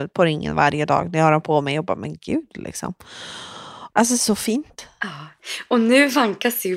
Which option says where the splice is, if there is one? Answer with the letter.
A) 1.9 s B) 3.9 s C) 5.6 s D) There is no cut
B